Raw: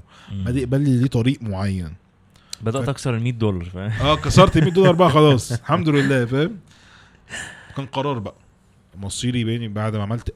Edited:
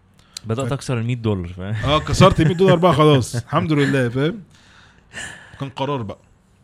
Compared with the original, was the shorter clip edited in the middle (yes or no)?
no